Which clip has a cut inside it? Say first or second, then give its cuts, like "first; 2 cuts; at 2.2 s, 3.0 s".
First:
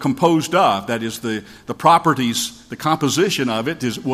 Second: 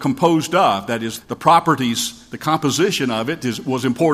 second; 1 cut; at 1.2 s